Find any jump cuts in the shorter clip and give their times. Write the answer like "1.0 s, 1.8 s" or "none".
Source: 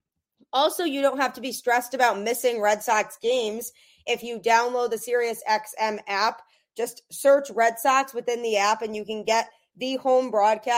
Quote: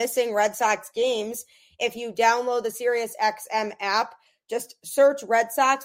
none